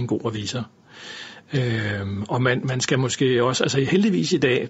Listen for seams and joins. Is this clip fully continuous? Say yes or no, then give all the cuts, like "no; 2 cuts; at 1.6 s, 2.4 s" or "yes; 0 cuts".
yes; 0 cuts